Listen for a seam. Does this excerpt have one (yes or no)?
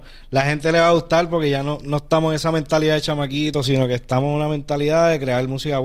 yes